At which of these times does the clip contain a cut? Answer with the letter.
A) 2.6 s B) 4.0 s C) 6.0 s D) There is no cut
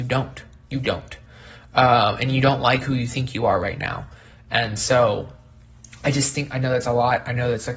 D